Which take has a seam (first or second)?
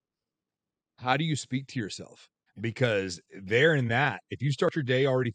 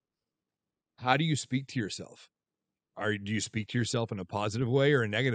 first